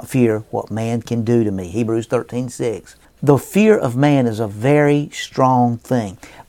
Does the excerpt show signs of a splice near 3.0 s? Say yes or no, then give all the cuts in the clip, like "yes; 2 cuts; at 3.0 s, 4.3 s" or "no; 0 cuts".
yes; 1 cut; at 3.0 s